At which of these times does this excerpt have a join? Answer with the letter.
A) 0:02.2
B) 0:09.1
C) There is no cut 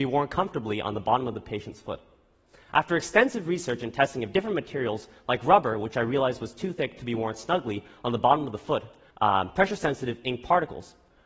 B